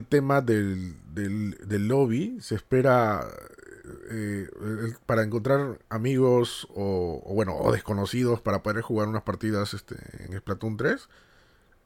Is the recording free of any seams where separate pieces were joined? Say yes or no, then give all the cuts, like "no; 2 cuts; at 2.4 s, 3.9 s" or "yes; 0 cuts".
yes; 0 cuts